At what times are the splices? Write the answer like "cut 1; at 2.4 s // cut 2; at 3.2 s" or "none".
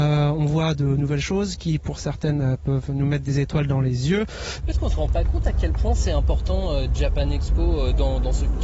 cut 1; at 4.6 s